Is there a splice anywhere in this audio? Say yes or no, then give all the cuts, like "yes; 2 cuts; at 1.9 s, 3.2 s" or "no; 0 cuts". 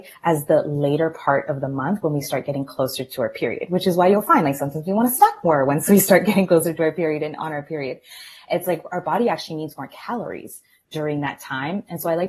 no; 0 cuts